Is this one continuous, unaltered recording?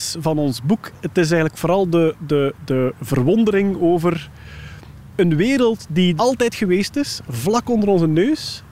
no; 1 cut; at 6.2 s

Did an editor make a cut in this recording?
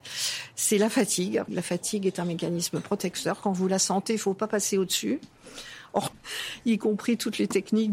yes; 2 cuts; at 1.5 s, 6.1 s

